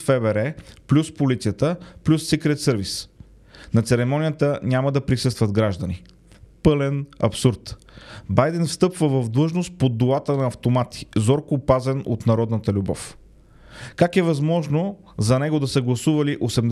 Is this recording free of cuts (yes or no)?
yes